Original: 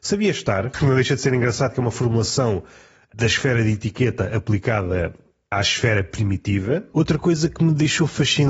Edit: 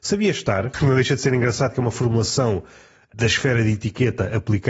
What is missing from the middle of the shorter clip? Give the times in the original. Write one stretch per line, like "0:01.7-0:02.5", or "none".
none